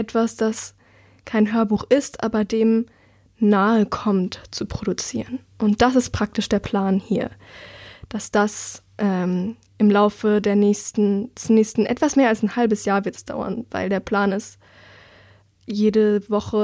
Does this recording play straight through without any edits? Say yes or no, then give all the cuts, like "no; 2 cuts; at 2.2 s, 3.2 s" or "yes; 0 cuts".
yes; 0 cuts